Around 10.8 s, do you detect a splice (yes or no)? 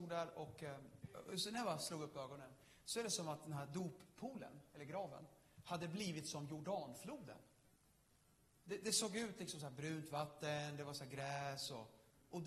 no